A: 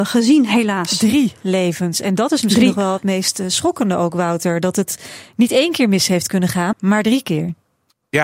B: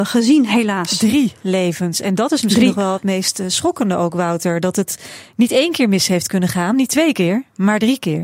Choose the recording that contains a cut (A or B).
A